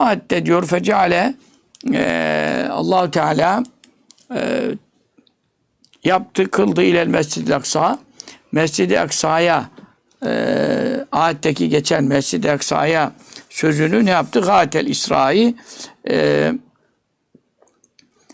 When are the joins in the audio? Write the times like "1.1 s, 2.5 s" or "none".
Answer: none